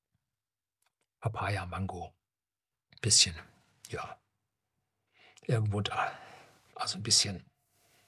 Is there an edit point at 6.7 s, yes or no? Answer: yes